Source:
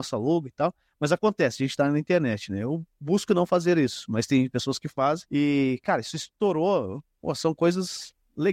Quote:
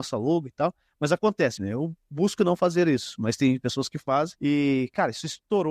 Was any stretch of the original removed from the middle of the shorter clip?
yes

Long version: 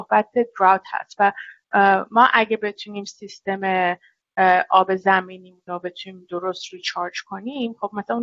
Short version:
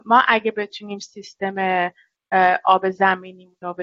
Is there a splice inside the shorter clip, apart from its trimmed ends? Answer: no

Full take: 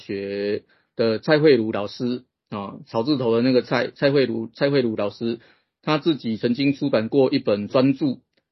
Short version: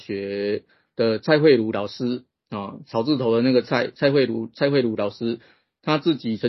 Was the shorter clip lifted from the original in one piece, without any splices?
yes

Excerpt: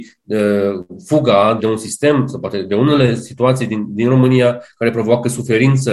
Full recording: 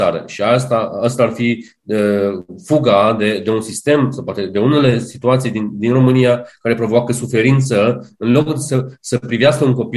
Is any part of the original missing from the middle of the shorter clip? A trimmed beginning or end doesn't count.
yes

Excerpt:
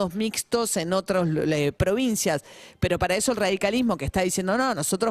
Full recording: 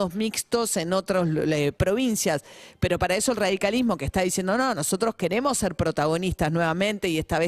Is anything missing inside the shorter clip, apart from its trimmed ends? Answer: no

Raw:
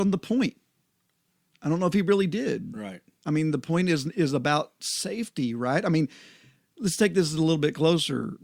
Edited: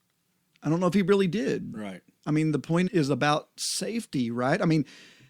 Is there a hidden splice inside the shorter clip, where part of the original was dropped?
yes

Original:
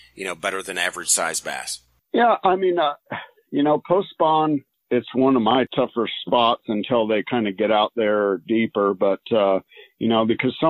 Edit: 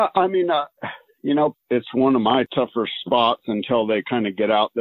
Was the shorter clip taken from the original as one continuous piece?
no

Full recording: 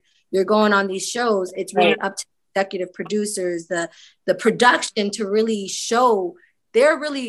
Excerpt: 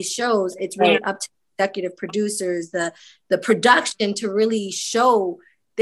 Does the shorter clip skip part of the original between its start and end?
no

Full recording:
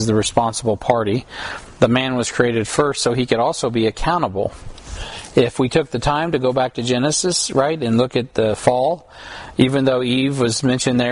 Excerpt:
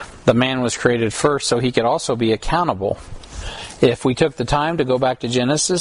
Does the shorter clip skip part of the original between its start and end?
no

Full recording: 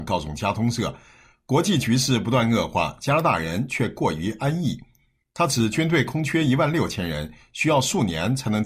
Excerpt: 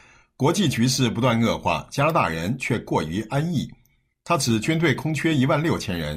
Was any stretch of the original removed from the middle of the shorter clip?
no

